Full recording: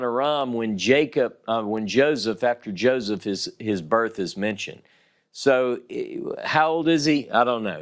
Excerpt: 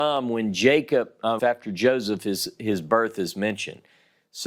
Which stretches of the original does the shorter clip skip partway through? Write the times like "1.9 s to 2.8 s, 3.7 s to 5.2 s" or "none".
1.6 s to 2.4 s